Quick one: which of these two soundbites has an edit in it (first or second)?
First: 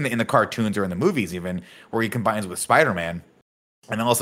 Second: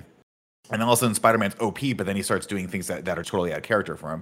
second